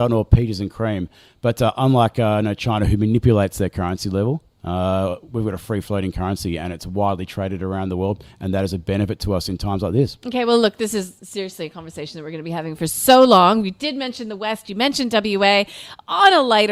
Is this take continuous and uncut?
yes; 0 cuts

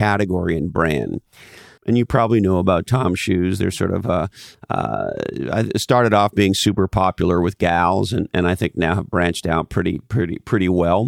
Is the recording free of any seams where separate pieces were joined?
no; 1 cut; at 1.8 s

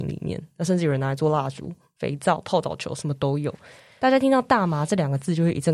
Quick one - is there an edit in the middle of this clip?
yes; 1 cut; at 4.0 s

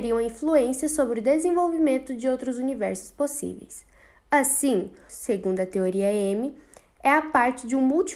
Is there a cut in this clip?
yes; 1 cut; at 5.1 s

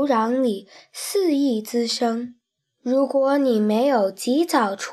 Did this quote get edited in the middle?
no; 0 cuts

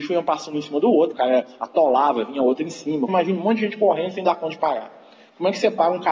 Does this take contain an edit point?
yes; 2 cuts; at 1.1 s, 3.1 s

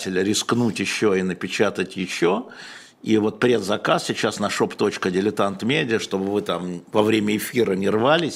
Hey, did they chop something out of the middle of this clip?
no; 0 cuts

